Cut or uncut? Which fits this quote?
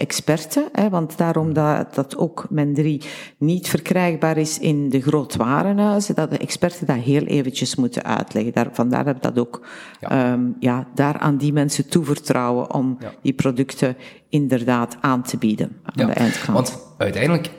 uncut